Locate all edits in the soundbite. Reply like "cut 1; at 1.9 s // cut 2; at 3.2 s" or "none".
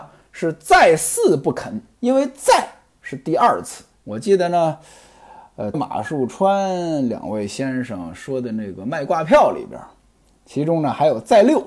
cut 1; at 1.9 s // cut 2; at 3.9 s // cut 3; at 5.7 s